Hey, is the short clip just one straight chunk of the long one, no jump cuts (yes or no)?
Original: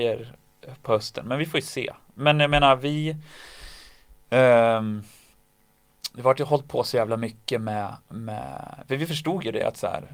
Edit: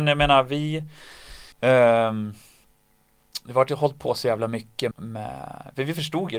no